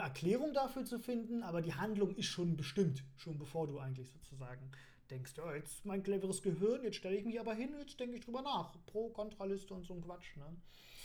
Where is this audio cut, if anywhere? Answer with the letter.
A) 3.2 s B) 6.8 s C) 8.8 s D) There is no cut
D